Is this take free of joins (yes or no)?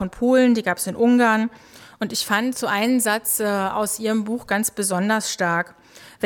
yes